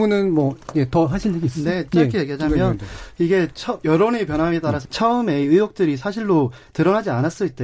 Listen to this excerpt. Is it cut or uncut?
cut